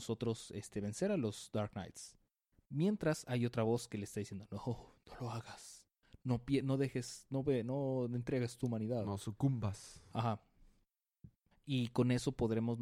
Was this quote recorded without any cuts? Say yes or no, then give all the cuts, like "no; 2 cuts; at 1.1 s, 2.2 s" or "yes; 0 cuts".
no; 1 cut; at 11.5 s